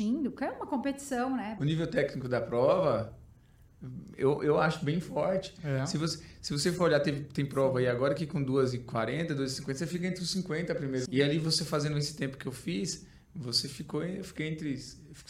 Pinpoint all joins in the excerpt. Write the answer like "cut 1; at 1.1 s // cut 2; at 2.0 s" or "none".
cut 1; at 1.6 s // cut 2; at 11.1 s